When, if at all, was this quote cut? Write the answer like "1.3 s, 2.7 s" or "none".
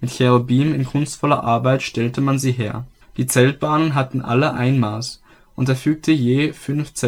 3.0 s